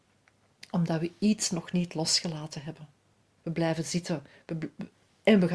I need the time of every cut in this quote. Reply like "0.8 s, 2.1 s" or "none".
3.4 s